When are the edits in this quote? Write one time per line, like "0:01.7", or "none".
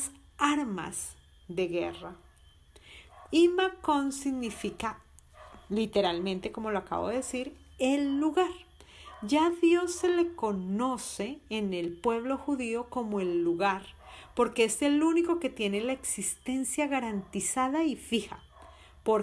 0:03.3